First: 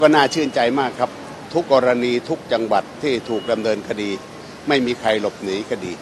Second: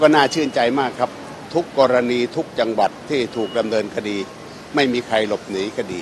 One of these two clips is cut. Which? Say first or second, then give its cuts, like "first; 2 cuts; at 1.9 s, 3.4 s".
first; 1 cut; at 1.6 s